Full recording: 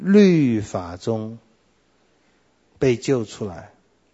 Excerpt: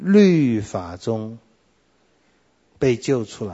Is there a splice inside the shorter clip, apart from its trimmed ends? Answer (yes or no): no